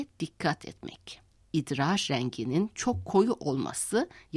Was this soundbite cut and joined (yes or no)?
yes